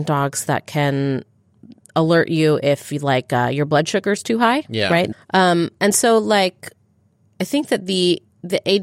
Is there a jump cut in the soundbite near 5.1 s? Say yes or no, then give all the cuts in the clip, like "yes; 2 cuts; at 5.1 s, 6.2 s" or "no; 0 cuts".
yes; 1 cut; at 5.1 s